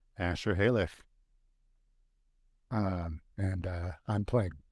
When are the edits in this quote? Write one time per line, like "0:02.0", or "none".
0:03.3